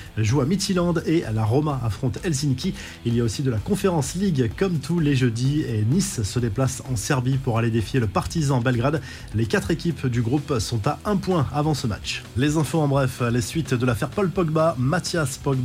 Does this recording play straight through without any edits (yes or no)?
yes